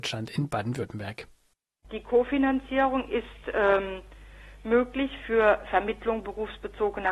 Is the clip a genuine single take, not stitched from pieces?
yes; 0 cuts

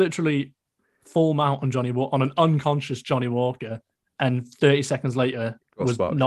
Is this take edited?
no; 0 cuts

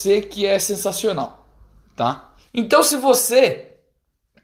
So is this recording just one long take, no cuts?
no; 1 cut; at 2.5 s

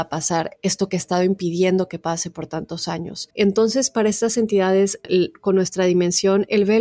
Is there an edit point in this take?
yes; 2 cuts; at 3.3 s, 5.0 s

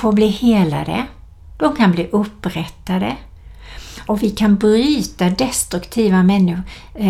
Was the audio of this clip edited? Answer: yes; 1 cut; at 4.1 s

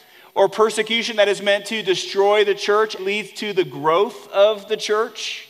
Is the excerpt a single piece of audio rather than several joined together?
no; 1 cut; at 3.0 s

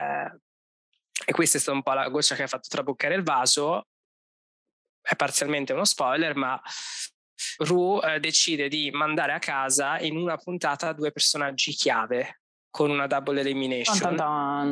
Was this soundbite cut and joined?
yes; 1 cut; at 7.6 s

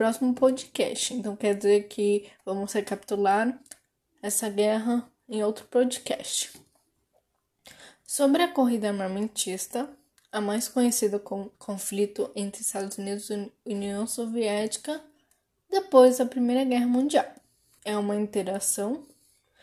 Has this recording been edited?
yes; 2 cuts; at 11.5 s, 17.8 s

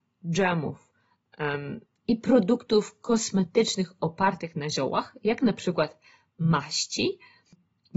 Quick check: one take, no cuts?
yes; 0 cuts

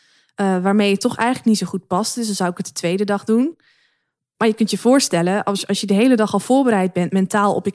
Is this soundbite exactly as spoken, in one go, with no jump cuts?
yes; 0 cuts

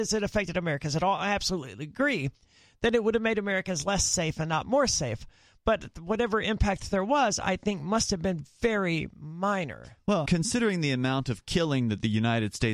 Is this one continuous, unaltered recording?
no; 2 cuts; at 8.4 s, 10.3 s

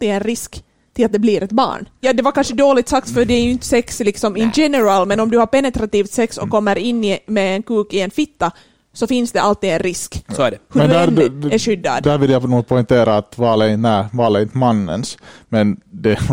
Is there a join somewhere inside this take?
no; 0 cuts

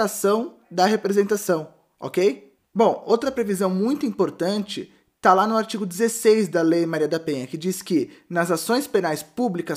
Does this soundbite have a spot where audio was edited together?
yes; 1 cut; at 2.6 s

